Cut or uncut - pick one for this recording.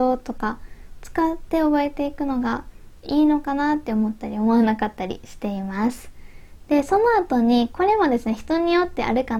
uncut